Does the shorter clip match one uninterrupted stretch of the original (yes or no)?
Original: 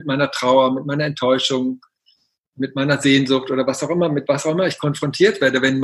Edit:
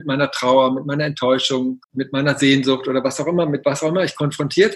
no